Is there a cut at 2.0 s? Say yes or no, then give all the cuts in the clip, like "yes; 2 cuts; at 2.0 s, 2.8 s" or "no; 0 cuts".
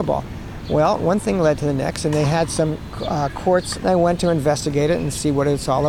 no; 1 cut; at 3.7 s